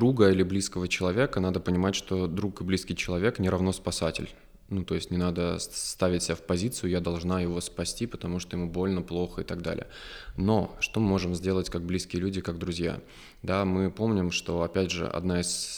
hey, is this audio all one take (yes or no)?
yes